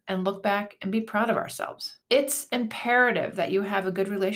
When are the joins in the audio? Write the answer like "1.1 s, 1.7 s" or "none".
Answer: 2.0 s